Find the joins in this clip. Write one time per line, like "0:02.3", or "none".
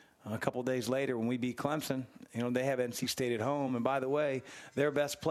none